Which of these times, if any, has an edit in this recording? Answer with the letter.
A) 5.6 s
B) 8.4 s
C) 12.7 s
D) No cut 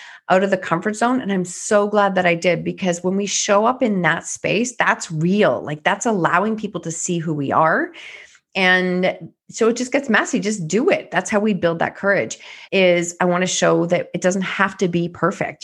C